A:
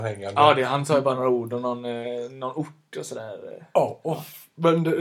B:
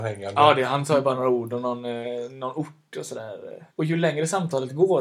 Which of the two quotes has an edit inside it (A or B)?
B